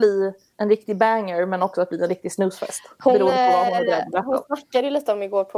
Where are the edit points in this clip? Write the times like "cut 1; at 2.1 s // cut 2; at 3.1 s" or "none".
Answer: none